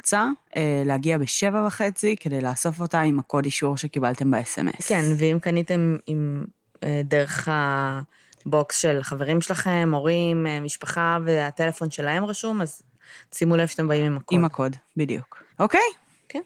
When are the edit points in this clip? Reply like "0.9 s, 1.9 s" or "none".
15.5 s